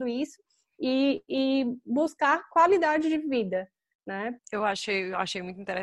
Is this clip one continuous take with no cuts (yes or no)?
no